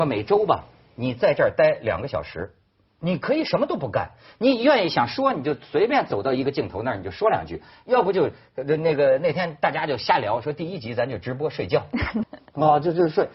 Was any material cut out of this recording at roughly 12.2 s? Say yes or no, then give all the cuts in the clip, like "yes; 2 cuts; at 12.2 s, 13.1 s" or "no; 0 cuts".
yes; 1 cut; at 12.2 s